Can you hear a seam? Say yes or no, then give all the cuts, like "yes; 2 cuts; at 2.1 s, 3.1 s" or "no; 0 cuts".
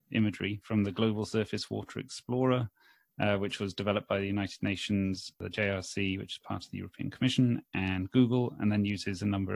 no; 0 cuts